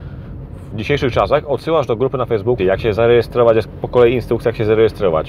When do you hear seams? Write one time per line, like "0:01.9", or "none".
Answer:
0:02.6